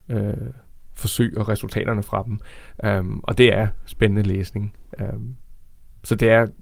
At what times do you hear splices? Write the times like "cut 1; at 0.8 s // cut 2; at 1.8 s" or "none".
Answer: none